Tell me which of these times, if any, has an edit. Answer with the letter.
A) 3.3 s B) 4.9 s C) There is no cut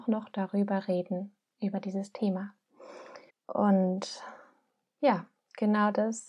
A